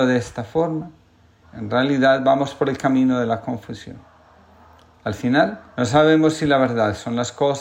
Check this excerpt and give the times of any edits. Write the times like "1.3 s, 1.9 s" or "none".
1.4 s, 5.7 s